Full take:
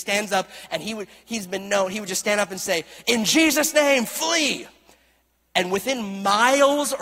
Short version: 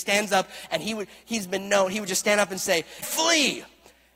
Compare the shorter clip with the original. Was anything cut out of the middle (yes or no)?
yes